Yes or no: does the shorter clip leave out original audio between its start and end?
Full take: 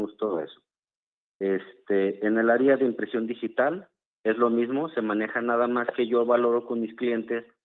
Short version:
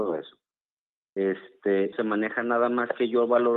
yes